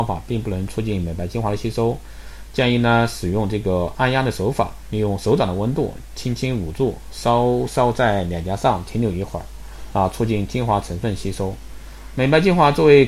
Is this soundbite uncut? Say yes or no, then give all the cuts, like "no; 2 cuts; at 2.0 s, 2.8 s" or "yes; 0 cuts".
yes; 0 cuts